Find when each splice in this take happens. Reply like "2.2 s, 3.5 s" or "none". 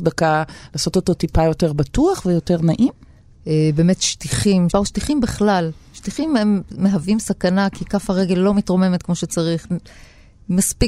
3.3 s, 4.7 s